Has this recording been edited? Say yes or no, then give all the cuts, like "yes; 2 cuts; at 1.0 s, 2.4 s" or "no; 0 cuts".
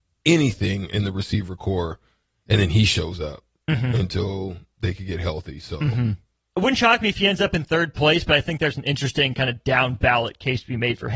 yes; 1 cut; at 6.4 s